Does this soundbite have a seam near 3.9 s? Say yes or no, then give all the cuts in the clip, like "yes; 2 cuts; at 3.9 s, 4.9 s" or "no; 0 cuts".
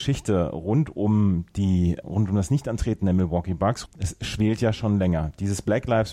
yes; 2 cuts; at 2.0 s, 3.9 s